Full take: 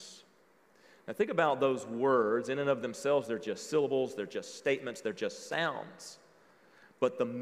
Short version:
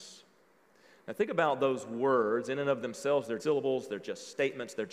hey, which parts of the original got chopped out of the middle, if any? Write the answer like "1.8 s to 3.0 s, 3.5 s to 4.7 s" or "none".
3.4 s to 3.7 s